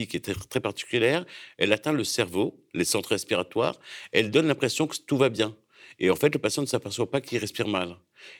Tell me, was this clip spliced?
no; 0 cuts

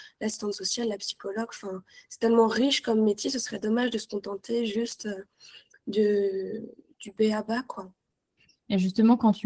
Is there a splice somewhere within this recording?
no; 0 cuts

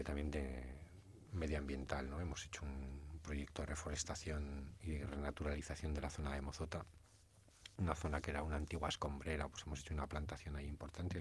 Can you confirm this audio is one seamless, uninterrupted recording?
yes; 0 cuts

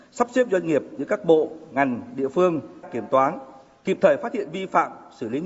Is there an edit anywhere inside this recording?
yes; 1 cut; at 2.8 s

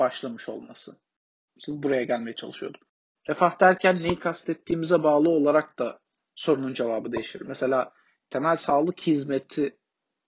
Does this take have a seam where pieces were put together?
yes; 2 cuts; at 1.5 s, 3.2 s

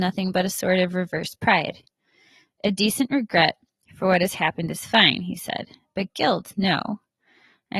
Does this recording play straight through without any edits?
yes; 0 cuts

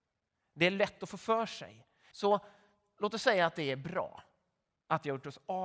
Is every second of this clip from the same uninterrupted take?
no; 1 cut; at 2.1 s

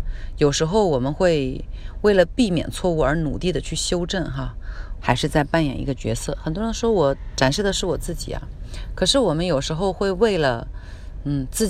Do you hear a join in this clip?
yes; 1 cut; at 5.0 s

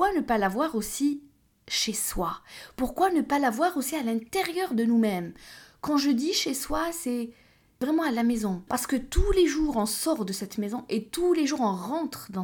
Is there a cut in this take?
yes; 1 cut; at 8.7 s

